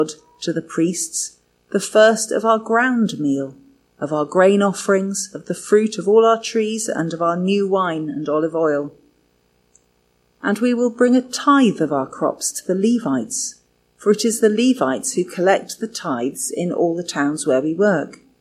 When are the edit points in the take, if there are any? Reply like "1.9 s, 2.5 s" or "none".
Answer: none